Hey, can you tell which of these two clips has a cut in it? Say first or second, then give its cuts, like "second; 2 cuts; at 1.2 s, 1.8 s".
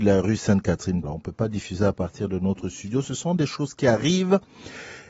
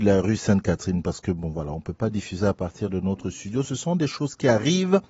first; 1 cut; at 1.0 s